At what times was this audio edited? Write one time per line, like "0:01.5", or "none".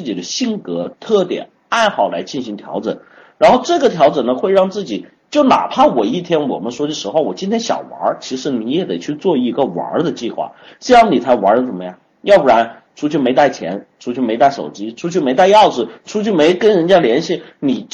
0:12.1